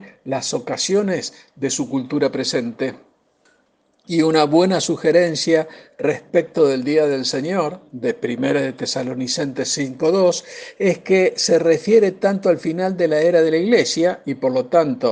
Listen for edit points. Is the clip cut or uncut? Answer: uncut